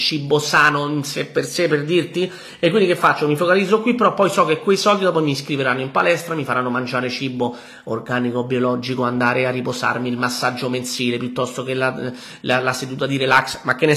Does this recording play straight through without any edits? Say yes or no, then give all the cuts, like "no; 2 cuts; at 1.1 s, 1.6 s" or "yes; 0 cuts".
yes; 0 cuts